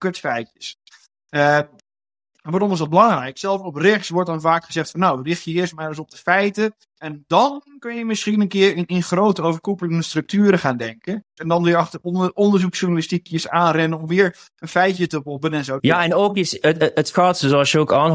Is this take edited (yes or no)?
yes